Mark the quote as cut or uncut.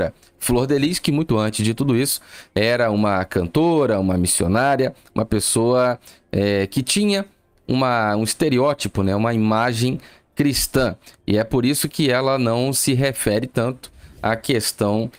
uncut